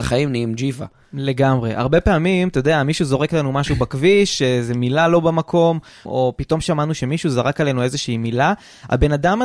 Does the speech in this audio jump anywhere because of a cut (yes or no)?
yes